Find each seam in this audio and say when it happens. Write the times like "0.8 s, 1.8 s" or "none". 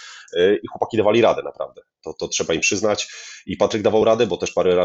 none